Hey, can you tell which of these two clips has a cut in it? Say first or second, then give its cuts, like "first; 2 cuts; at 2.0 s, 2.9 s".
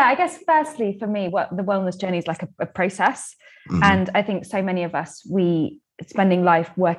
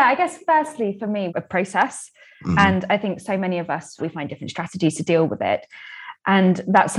second; 2 cuts; at 1.3 s, 4.0 s